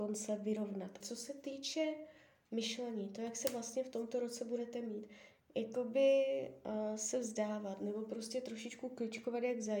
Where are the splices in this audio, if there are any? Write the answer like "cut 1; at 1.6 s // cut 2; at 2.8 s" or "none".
cut 1; at 1.0 s // cut 2; at 5.4 s